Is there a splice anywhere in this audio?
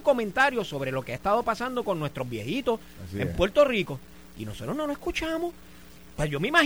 no; 0 cuts

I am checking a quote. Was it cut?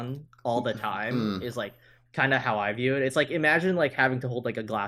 no; 0 cuts

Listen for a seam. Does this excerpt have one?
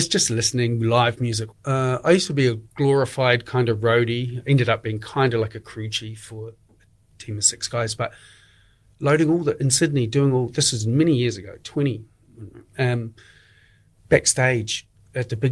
yes; 1 cut; at 1.5 s

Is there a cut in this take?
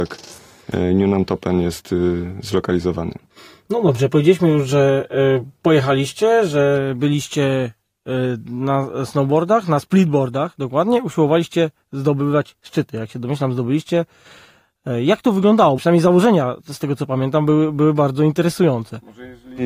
yes; 1 cut; at 15.8 s

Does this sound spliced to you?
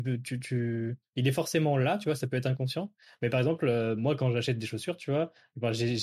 no; 0 cuts

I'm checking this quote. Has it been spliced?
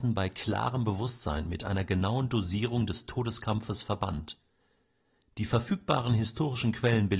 no; 0 cuts

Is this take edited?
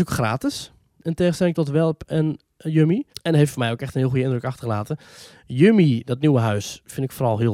yes; 1 cut; at 3.1 s

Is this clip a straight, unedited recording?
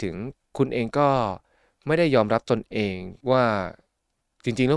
no; 1 cut; at 3.2 s

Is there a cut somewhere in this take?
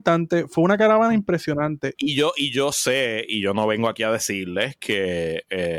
yes; 1 cut; at 1.9 s

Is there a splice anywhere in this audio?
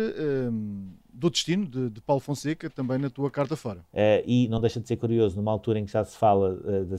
yes; 1 cut; at 3.9 s

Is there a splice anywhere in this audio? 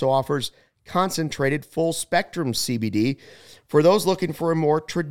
no; 0 cuts

